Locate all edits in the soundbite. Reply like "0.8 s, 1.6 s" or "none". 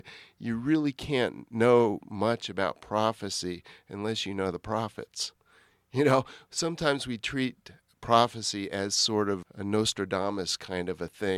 9.4 s